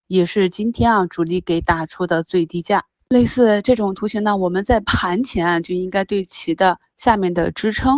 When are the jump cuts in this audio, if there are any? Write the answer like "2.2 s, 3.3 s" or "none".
3.1 s